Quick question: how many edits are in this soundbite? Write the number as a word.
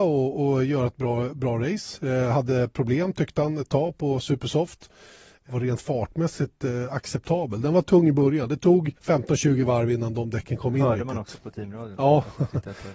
two